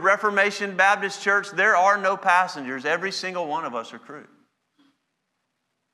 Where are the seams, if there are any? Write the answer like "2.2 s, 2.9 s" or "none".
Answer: none